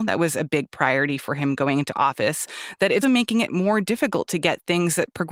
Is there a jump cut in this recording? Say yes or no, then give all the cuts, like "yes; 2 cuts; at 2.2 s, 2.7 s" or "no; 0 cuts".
yes; 1 cut; at 3.0 s